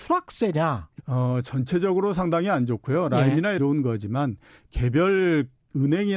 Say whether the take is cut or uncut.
cut